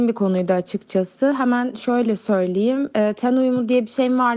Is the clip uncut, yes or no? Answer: yes